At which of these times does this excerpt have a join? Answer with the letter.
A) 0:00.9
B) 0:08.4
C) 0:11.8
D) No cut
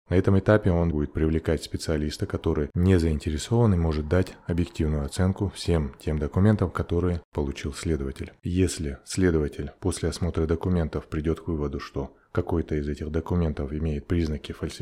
A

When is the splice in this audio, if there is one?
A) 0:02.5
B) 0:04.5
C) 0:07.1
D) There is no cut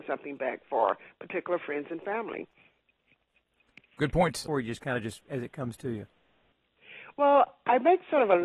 B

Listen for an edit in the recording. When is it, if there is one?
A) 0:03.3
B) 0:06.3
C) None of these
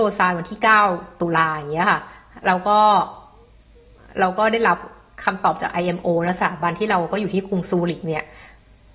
C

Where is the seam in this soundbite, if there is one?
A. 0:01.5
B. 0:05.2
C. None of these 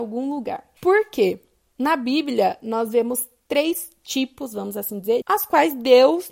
B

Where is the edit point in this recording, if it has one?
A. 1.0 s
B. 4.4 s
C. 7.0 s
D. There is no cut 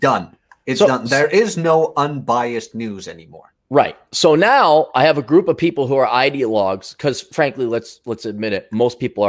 D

